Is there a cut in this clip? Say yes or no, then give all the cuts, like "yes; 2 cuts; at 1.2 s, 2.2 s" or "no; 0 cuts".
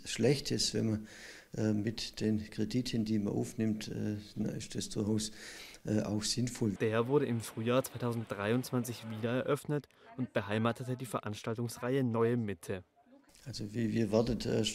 yes; 3 cuts; at 4.3 s, 6.7 s, 13.3 s